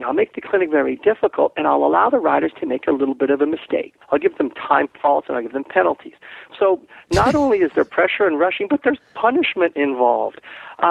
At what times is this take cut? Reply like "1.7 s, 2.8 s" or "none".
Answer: 4.0 s, 6.5 s